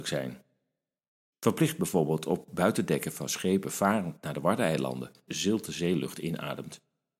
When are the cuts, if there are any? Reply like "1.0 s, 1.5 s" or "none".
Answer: 1.3 s, 5.3 s